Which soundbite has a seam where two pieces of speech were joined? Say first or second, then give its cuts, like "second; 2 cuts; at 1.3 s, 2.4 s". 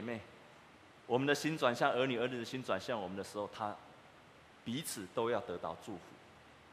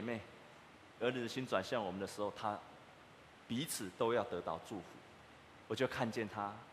second; 2 cuts; at 1.0 s, 5.7 s